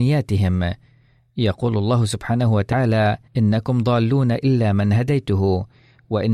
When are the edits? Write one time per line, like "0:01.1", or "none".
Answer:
0:03.3

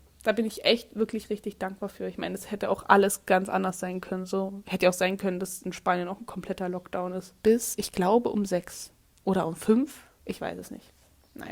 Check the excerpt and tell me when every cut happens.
0:07.4

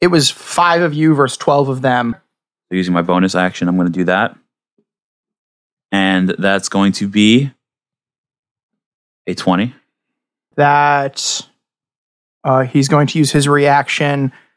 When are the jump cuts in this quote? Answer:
0:02.1
0:10.5

